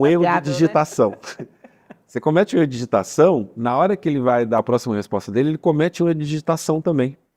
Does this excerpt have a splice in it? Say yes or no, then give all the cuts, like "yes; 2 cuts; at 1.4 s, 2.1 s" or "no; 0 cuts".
no; 0 cuts